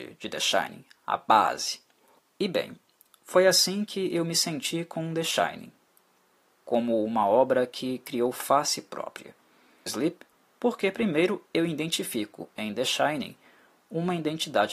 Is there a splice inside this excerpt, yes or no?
yes